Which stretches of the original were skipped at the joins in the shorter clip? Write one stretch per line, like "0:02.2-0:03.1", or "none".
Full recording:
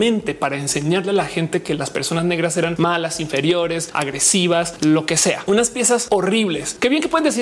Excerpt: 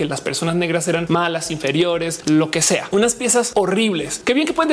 0:03.9-0:04.8